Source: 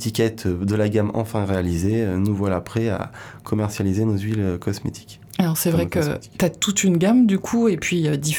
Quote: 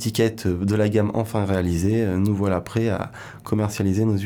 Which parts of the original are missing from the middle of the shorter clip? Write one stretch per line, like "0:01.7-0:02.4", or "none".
none

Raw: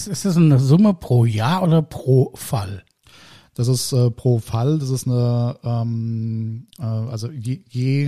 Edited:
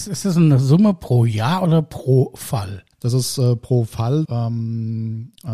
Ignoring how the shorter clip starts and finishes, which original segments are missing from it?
0:02.9-0:03.5
0:04.8-0:05.6

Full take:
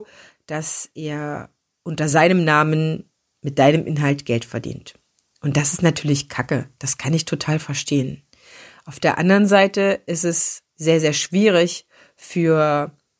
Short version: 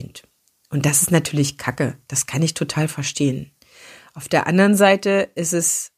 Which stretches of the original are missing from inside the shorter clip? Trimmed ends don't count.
none

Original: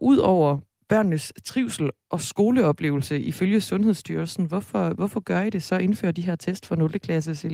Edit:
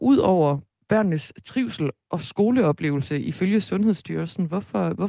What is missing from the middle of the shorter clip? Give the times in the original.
none

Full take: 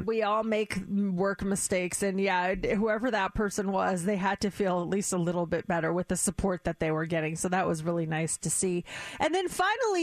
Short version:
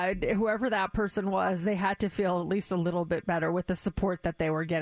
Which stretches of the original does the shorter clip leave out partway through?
none

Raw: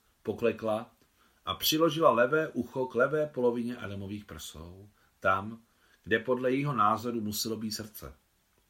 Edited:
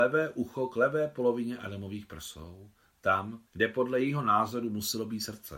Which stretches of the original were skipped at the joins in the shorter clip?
0:05.7-0:06.0

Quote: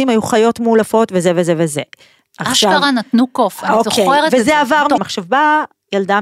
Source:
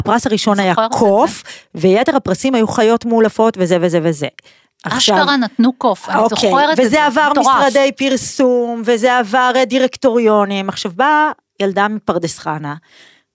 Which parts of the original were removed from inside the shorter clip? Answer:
0:07.4-0:10.6

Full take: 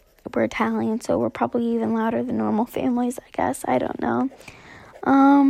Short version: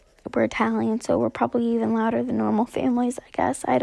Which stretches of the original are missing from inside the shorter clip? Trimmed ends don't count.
none

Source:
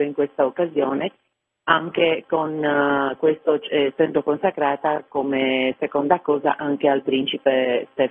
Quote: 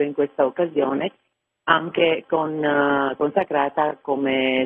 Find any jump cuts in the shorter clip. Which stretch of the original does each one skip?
0:03.2-0:04.2

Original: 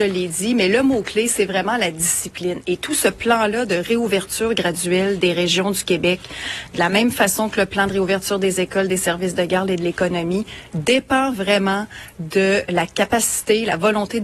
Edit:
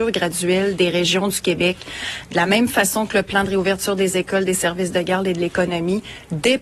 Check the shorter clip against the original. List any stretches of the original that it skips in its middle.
none

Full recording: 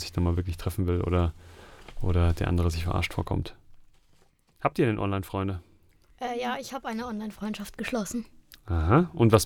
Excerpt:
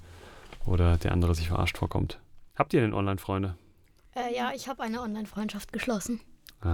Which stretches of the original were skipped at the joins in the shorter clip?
0:03.8-0:04.5

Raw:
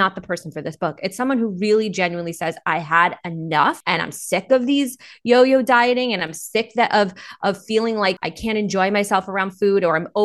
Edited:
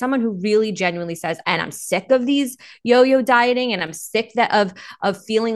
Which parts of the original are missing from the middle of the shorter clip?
0:02.6-0:03.8

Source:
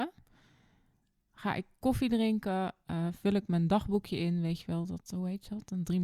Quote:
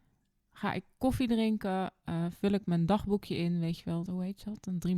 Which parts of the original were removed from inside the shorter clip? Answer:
0:04.9-0:05.1

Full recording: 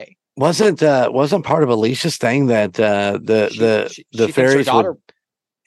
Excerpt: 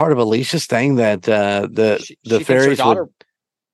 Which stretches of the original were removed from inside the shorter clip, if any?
0:03.5-0:03.9

